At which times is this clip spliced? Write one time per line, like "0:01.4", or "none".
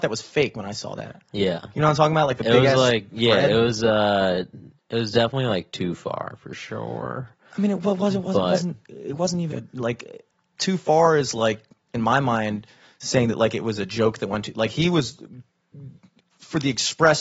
0:09.5